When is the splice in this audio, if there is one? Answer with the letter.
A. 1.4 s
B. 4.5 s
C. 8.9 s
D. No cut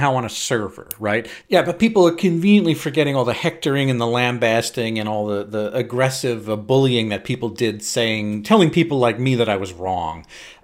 A